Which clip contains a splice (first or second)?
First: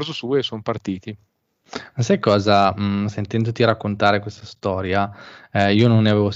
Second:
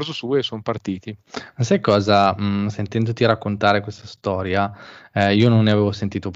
second